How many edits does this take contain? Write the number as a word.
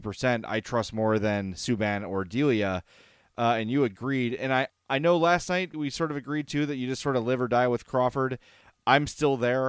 two